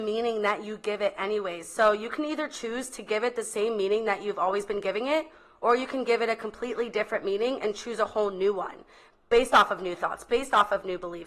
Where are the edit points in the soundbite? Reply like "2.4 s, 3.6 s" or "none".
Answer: none